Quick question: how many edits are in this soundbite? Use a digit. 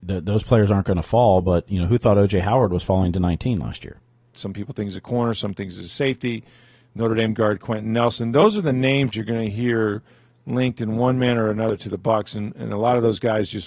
1